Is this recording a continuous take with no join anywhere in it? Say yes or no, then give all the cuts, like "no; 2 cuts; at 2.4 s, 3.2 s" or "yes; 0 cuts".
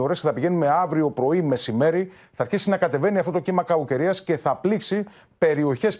yes; 0 cuts